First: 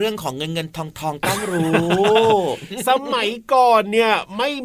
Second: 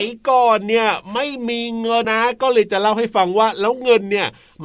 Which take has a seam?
second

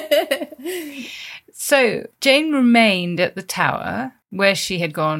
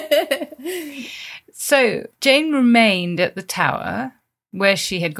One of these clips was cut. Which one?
first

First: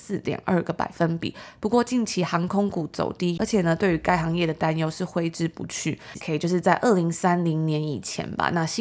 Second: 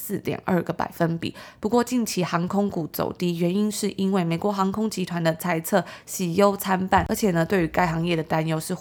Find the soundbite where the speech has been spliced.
first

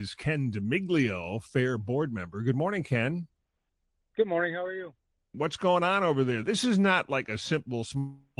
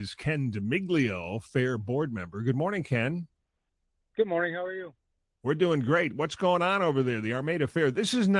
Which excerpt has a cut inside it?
first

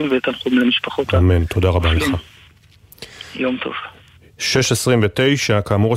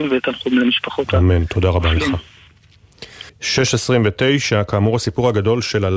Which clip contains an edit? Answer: second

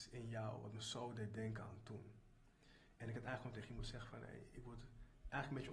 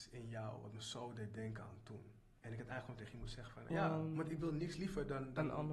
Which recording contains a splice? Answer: second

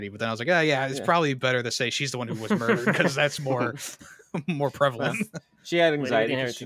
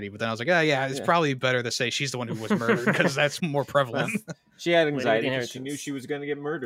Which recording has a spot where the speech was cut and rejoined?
second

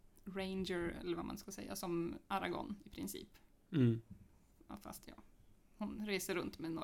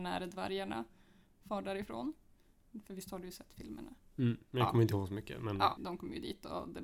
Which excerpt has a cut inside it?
second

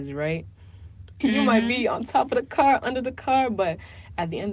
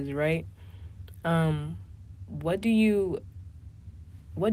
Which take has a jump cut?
first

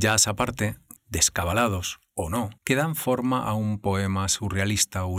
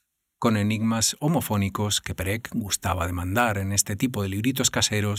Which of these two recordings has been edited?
first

